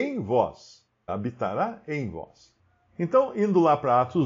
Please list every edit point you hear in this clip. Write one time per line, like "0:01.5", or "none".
0:01.1